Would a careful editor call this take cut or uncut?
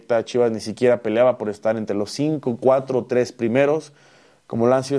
uncut